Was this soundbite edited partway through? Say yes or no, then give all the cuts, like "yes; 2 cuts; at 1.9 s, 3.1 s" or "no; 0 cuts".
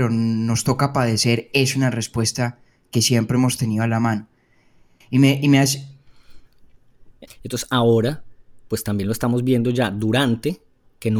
yes; 2 cuts; at 5.0 s, 7.3 s